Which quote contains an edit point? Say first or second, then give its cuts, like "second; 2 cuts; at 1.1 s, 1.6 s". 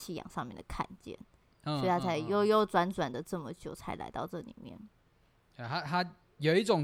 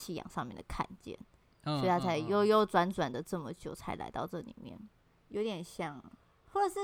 second; 1 cut; at 5.1 s